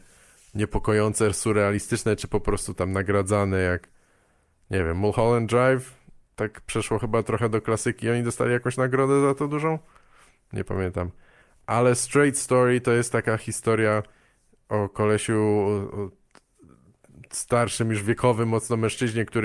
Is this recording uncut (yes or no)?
yes